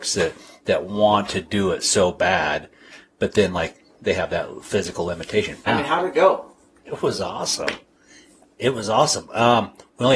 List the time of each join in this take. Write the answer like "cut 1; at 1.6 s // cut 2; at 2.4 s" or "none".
cut 1; at 5.7 s